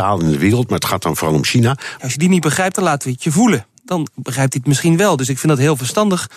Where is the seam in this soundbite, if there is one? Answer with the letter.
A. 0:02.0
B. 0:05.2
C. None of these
A